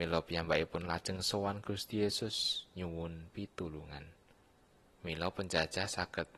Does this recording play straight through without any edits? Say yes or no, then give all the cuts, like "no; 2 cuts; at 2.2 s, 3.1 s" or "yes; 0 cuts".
no; 1 cut; at 4.9 s